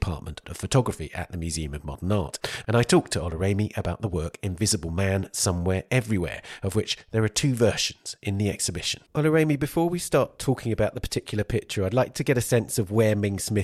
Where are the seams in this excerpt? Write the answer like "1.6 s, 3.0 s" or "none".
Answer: 9.1 s